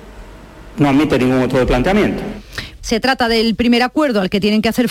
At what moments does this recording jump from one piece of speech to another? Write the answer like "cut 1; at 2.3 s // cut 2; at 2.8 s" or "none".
cut 1; at 1.5 s // cut 2; at 2.8 s